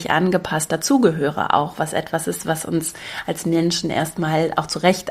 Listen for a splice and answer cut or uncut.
uncut